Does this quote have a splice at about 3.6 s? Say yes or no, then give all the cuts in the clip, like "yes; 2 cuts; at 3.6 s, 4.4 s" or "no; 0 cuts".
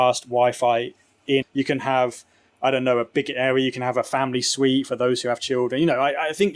no; 1 cut; at 1.4 s